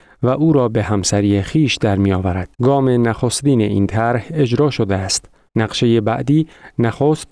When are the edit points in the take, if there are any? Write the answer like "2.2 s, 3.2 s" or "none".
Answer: 2.5 s, 5.5 s